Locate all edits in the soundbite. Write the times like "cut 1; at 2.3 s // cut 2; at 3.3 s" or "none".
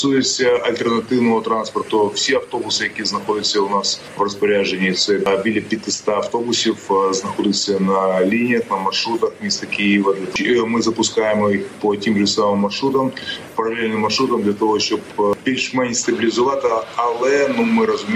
none